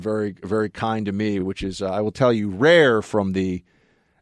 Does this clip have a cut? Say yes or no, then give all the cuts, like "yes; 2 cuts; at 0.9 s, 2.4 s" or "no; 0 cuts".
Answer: no; 0 cuts